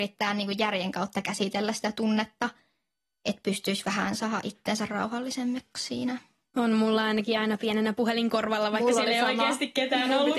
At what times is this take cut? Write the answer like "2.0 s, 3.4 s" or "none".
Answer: none